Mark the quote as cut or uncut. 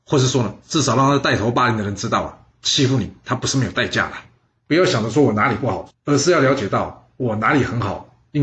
cut